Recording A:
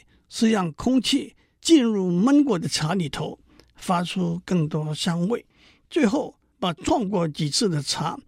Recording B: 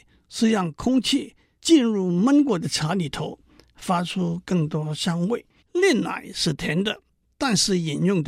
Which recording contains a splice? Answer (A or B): B